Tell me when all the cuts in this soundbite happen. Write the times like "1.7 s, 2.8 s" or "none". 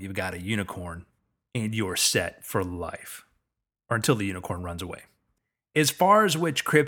none